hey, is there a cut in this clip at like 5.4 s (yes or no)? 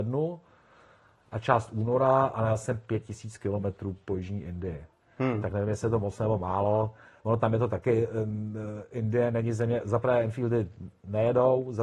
no